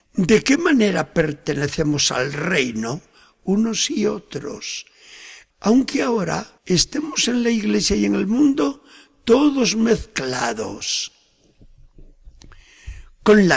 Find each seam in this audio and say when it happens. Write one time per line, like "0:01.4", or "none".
0:05.5
0:06.6